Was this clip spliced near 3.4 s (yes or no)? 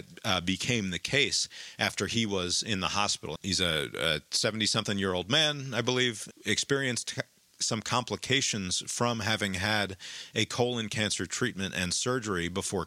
yes